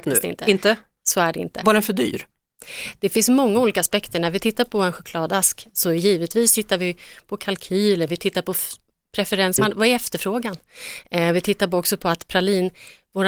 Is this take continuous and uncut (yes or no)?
no